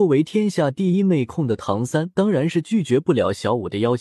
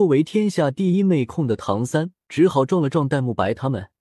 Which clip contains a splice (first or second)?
second